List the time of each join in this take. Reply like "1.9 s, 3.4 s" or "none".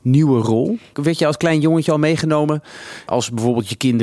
0.9 s, 3.1 s